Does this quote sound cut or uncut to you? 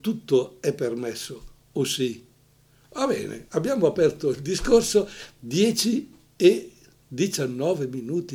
uncut